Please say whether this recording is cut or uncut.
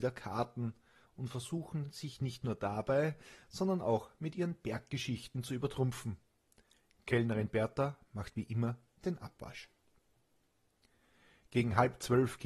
uncut